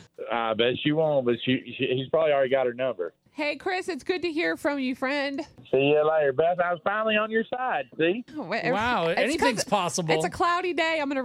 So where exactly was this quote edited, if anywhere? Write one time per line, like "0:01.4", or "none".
none